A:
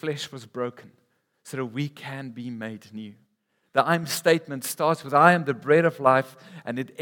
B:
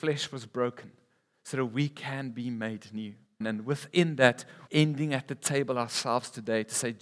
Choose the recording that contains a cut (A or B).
B